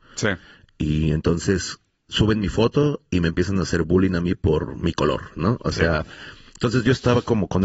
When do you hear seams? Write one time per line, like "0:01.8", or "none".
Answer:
none